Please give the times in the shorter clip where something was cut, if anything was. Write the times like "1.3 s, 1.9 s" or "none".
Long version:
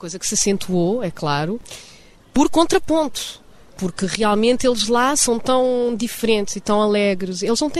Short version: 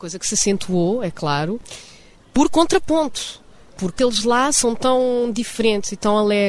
4.0 s